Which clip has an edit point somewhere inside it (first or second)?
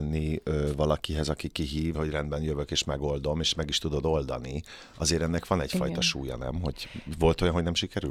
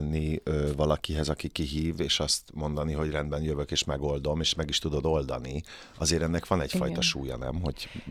first